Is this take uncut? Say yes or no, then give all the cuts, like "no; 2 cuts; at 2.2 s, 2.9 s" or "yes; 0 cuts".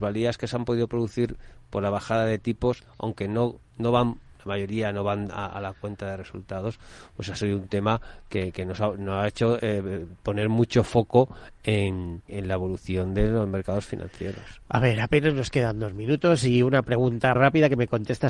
no; 2 cuts; at 12.3 s, 17.4 s